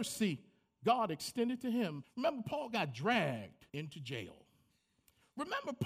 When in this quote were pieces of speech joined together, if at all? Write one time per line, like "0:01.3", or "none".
0:02.0
0:03.7